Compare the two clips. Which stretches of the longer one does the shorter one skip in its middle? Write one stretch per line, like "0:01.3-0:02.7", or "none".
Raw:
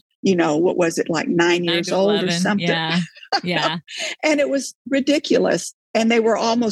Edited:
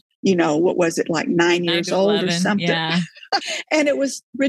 0:03.4-0:03.9